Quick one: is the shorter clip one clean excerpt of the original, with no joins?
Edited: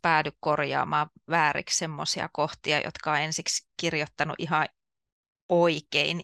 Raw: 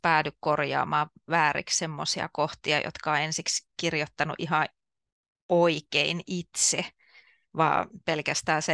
yes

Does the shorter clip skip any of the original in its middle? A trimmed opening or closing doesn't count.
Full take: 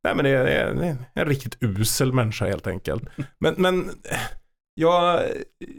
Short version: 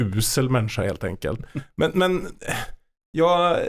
no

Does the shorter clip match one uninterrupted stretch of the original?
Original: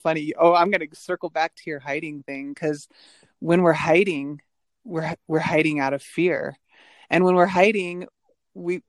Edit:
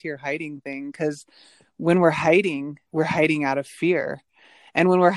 no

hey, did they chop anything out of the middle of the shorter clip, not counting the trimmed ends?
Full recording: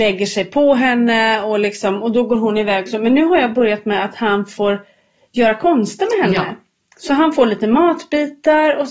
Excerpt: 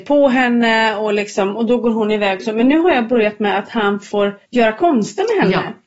yes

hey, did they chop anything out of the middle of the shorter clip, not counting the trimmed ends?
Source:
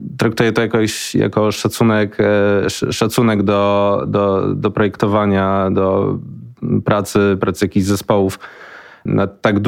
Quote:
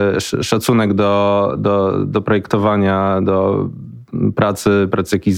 no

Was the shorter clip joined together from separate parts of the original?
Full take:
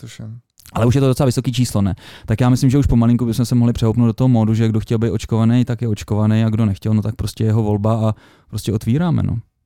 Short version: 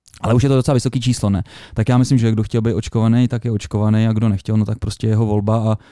yes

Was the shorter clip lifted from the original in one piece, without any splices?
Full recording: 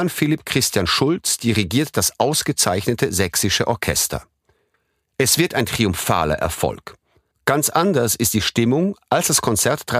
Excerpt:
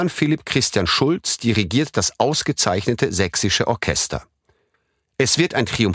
yes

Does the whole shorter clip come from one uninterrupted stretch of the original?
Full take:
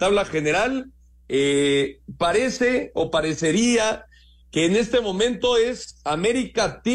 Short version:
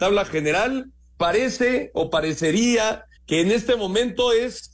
no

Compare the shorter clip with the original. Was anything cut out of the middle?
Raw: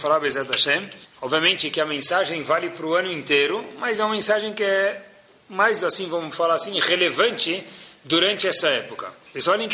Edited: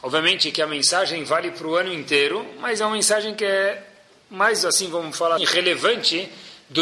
yes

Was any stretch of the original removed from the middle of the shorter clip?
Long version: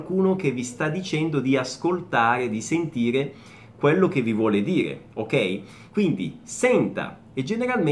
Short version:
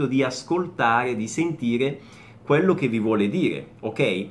no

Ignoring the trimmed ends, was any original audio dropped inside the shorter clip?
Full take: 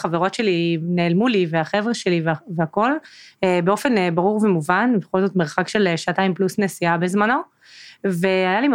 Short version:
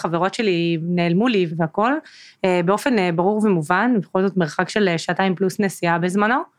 yes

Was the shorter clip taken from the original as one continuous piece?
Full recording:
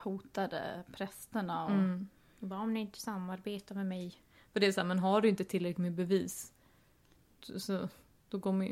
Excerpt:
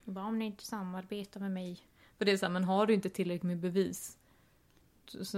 yes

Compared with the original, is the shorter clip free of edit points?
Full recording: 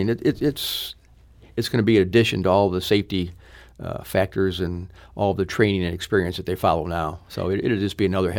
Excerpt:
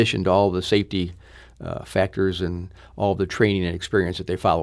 yes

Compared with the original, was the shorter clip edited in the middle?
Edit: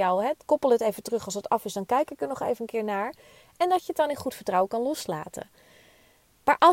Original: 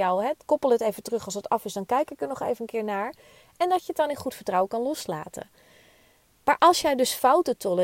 no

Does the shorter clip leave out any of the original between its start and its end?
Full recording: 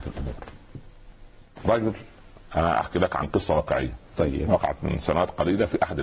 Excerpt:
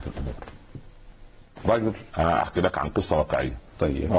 yes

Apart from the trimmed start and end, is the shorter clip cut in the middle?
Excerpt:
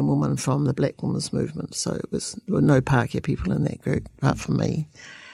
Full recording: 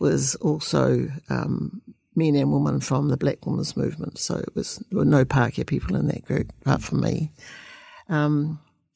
no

